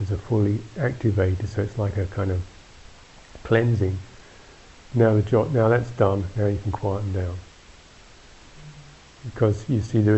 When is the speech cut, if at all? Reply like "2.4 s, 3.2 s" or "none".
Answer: none